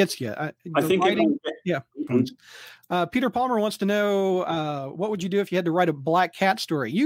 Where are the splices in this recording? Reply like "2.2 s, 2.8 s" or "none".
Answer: 2.1 s